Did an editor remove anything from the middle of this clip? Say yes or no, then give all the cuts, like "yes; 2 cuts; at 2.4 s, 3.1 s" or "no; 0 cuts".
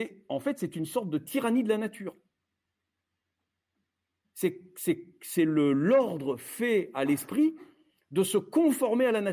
no; 0 cuts